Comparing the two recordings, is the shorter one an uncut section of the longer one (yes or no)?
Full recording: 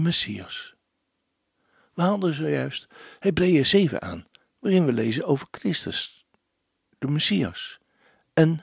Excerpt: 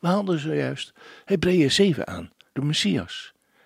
no